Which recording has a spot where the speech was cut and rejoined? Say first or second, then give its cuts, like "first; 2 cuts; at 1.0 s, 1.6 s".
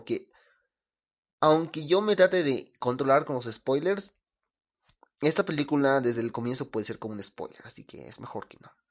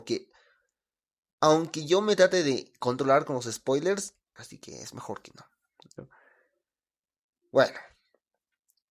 second; 1 cut; at 4.4 s